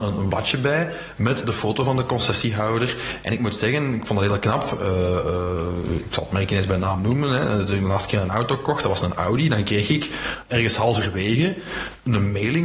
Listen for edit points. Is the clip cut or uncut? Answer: cut